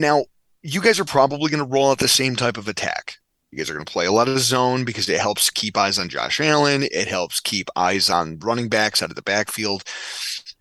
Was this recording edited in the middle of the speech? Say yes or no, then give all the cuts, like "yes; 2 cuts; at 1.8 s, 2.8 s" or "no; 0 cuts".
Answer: no; 0 cuts